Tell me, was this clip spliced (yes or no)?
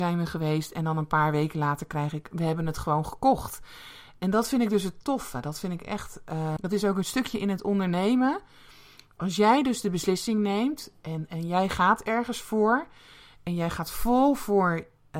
yes